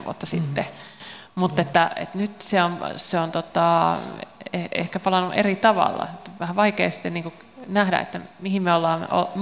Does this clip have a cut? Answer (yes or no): no